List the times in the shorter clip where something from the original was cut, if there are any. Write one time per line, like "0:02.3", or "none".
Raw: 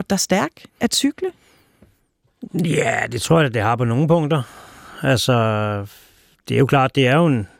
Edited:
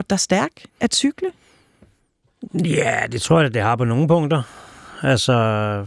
none